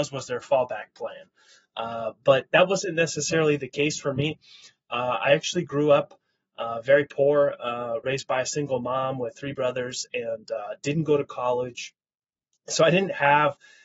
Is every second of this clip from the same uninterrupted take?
yes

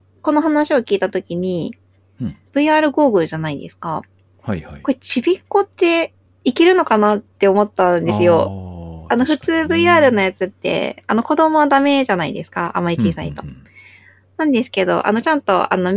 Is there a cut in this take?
yes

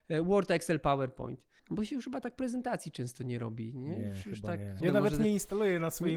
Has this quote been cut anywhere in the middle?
yes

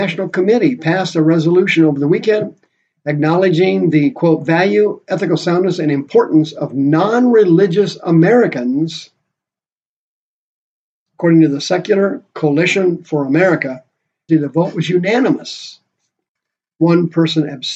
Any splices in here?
yes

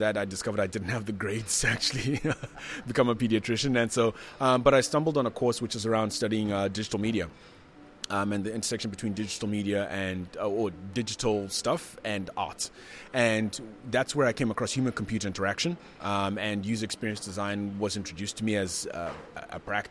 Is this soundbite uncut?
yes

